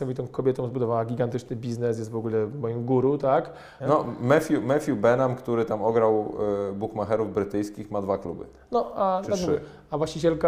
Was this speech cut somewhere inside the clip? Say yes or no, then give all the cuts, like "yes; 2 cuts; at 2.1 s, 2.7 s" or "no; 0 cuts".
yes; 1 cut; at 3.8 s